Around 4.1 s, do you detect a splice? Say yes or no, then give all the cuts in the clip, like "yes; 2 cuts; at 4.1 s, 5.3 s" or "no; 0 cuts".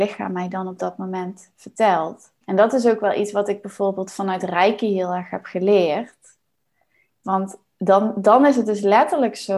no; 2 cuts; at 2.4 s, 7.2 s